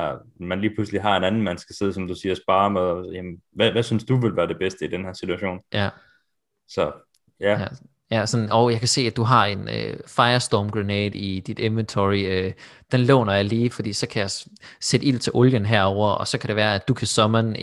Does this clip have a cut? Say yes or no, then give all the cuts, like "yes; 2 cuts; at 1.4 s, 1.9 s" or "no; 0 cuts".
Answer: no; 0 cuts